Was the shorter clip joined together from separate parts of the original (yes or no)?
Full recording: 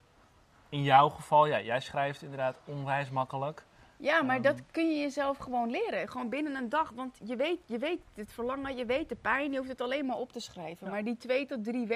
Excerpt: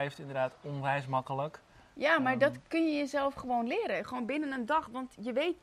no